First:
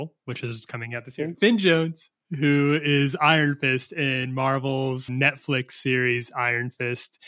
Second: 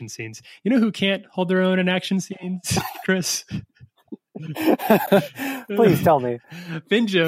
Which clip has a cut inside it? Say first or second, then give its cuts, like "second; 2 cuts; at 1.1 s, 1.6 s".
first; 2 cuts; at 1.3 s, 5.1 s